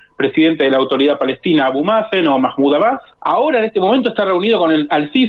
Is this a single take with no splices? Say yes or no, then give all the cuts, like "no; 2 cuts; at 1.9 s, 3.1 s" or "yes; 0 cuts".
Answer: yes; 0 cuts